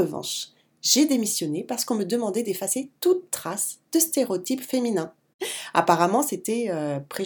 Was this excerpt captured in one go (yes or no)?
yes